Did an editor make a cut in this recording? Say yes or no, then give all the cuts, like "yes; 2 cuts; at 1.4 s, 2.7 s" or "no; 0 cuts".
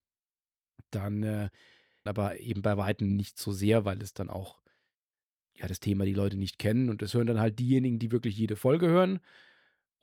yes; 1 cut; at 2.1 s